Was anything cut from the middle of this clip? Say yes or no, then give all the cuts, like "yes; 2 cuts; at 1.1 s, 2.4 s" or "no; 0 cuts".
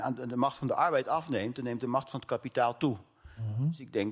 no; 0 cuts